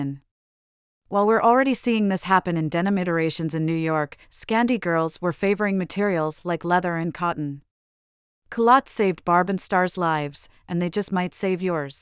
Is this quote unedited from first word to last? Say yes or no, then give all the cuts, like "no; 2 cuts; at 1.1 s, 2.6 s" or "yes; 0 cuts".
yes; 0 cuts